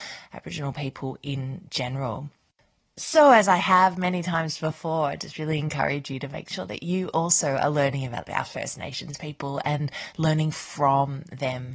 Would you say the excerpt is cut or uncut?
uncut